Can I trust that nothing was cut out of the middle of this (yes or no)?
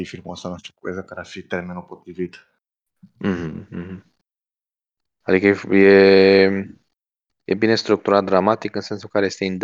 yes